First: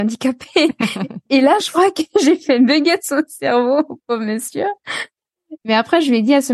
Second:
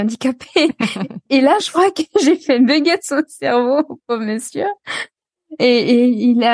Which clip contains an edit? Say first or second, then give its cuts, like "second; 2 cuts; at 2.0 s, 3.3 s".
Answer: first; 1 cut; at 5.6 s